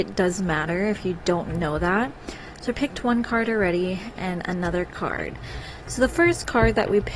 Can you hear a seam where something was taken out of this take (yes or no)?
no